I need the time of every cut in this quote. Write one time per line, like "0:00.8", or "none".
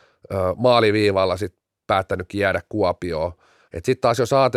0:03.7